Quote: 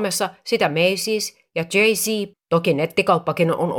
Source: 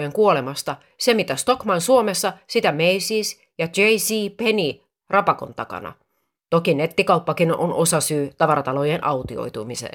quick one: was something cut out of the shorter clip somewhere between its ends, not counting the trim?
yes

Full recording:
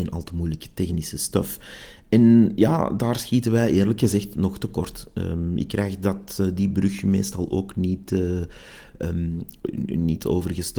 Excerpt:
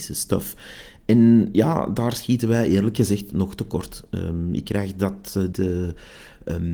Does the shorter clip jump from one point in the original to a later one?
yes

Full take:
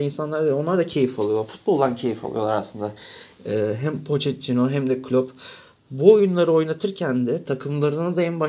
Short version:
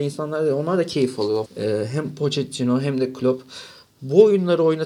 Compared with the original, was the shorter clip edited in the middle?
yes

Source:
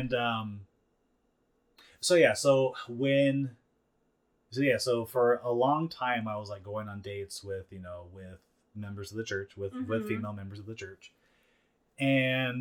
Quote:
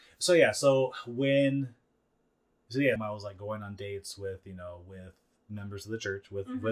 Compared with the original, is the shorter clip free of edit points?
no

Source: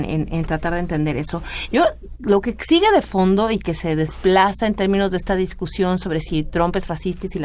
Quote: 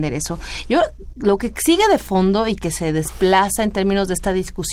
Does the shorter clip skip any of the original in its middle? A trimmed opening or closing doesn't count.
no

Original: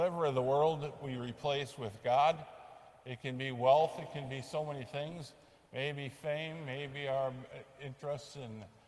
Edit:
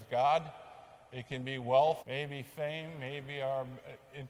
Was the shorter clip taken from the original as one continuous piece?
no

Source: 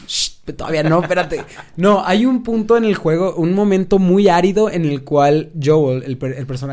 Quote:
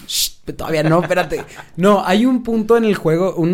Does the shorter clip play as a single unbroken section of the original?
yes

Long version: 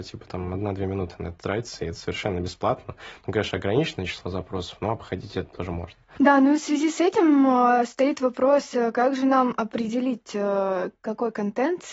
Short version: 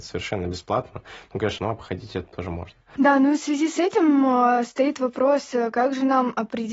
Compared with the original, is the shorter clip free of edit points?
no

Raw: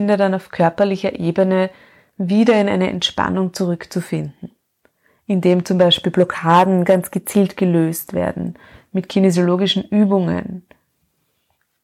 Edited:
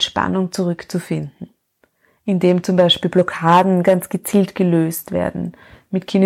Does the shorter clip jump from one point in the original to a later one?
no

